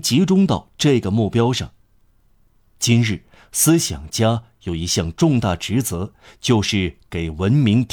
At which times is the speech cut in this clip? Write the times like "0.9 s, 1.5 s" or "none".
none